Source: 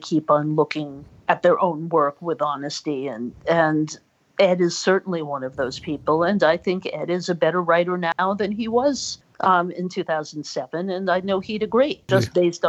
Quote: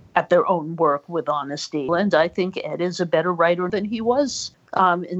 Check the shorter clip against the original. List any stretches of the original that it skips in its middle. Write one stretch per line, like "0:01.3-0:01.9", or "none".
0:03.0-0:06.2
0:08.0-0:08.4